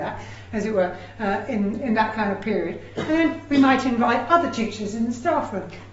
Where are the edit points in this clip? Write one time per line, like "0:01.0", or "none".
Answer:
none